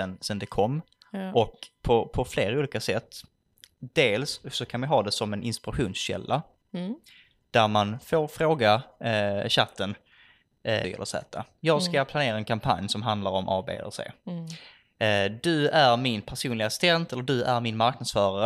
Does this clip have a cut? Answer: yes; 1 cut; at 10.8 s

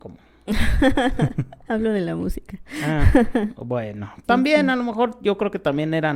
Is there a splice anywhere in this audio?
yes; 1 cut; at 4.2 s

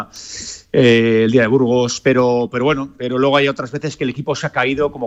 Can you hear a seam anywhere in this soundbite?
no; 0 cuts

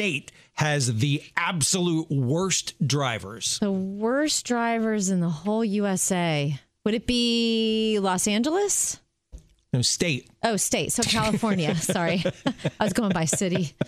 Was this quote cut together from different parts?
no; 0 cuts

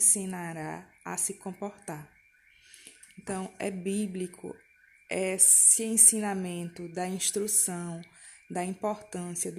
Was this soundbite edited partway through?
no; 0 cuts

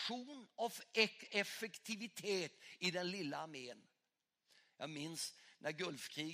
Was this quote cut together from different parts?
no; 0 cuts

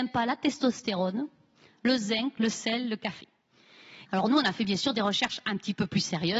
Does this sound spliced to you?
yes; 1 cut; at 4.1 s

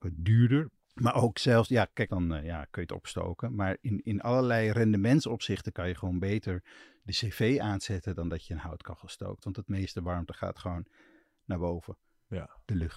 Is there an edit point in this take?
yes; 1 cut; at 2.1 s

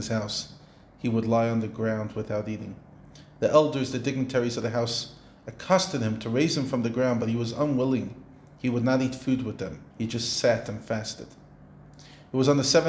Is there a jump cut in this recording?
yes; 1 cut; at 9.9 s

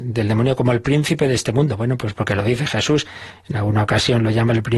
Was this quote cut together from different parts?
no; 0 cuts

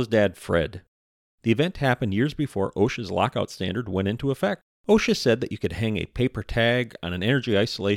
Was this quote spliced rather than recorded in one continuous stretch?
yes; 1 cut; at 4.8 s

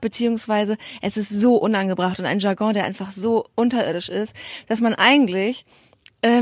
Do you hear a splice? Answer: no; 0 cuts

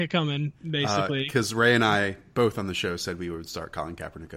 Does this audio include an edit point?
no; 0 cuts

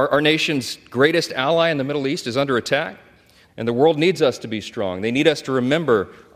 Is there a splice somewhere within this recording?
yes; 1 cut; at 3.5 s

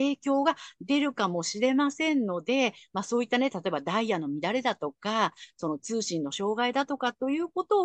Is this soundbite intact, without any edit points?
yes; 0 cuts

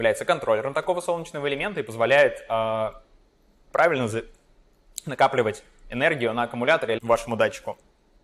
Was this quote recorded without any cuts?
no; 1 cut; at 7.0 s

